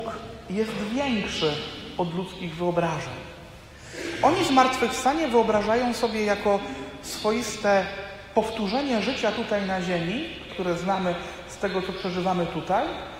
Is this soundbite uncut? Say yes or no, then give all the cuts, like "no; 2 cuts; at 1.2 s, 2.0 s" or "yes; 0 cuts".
no; 1 cut; at 10.5 s